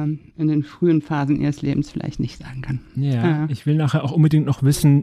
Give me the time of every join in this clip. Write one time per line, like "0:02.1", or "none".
none